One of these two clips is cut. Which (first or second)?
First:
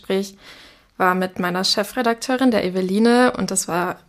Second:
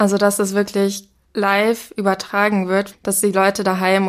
second